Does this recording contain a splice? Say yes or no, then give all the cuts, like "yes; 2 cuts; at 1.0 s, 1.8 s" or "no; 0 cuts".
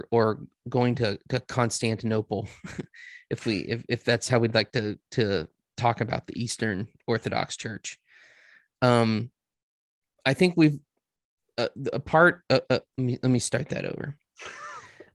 yes; 1 cut; at 12.9 s